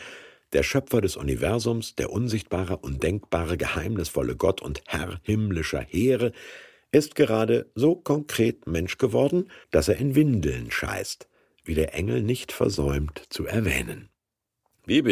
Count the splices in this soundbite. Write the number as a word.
one